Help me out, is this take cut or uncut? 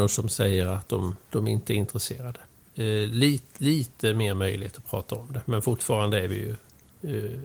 cut